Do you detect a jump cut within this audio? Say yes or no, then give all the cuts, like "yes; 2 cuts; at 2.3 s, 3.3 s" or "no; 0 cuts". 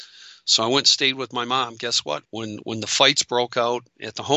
yes; 1 cut; at 2.3 s